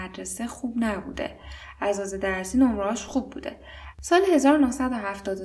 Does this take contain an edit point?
yes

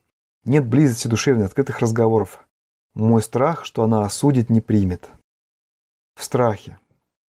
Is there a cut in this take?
yes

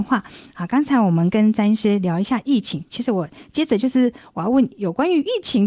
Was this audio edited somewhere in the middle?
no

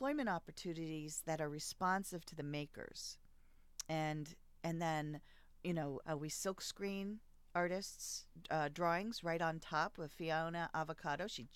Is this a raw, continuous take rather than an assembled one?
no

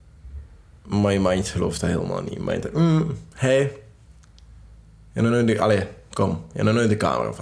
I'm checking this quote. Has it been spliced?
no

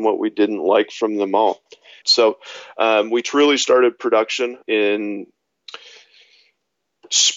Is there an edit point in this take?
yes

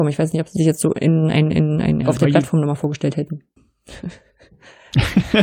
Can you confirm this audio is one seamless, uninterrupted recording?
no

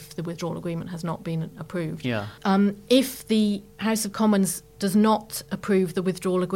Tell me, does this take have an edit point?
yes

